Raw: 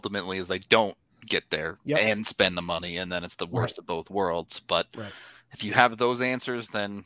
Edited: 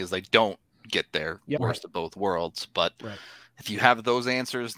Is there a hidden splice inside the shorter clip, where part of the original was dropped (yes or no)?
yes